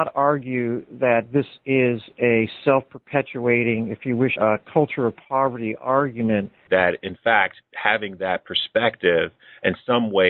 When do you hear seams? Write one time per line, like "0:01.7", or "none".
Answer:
0:04.4
0:06.7